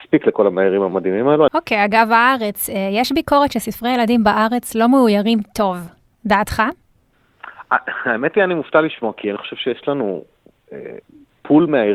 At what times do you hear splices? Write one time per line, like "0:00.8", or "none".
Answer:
0:01.5